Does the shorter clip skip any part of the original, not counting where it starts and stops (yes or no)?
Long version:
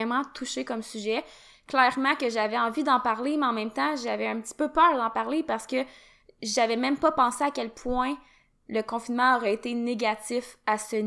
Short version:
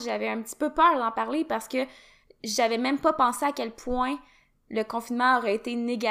no